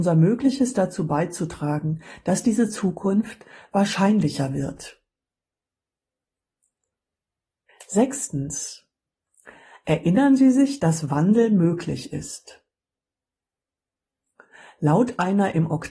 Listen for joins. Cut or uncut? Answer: uncut